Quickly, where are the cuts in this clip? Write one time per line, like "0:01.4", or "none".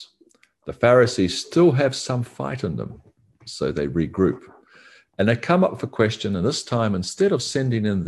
none